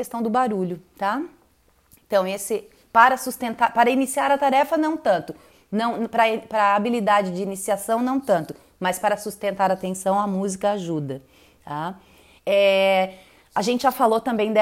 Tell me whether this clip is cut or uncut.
cut